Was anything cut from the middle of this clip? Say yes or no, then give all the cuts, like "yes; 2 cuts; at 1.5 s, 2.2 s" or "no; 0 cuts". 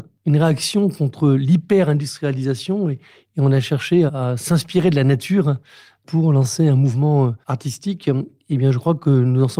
yes; 2 cuts; at 4.1 s, 7.4 s